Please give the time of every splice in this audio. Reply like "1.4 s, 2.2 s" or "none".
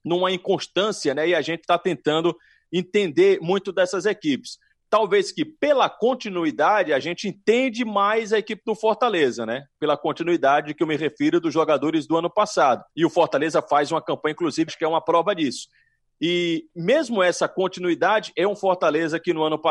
12.9 s, 14.7 s